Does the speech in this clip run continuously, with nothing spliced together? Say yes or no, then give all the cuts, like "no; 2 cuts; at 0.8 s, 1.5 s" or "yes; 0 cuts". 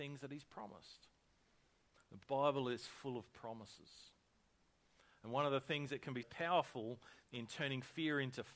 no; 2 cuts; at 1.9 s, 6.2 s